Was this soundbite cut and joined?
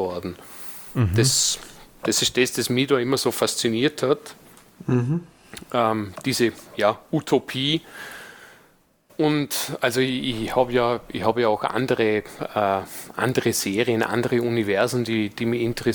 no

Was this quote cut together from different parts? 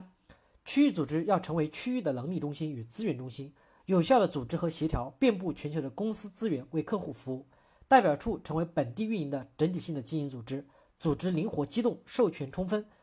no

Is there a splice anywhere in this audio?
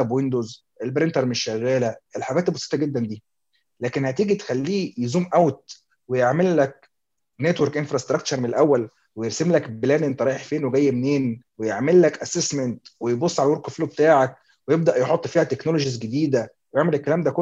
yes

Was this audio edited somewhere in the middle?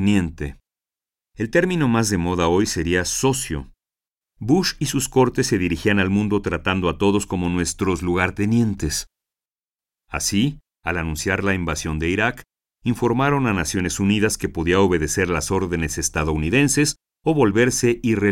yes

